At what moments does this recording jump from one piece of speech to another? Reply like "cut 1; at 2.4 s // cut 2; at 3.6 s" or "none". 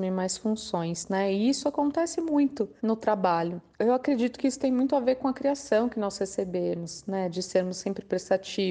cut 1; at 3.8 s